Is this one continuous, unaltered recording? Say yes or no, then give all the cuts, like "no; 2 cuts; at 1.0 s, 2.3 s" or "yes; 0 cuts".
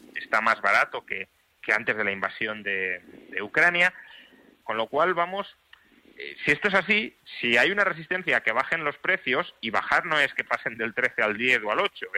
no; 2 cuts; at 1.6 s, 4.6 s